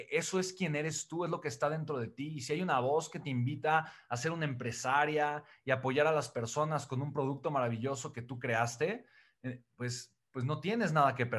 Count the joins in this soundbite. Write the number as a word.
zero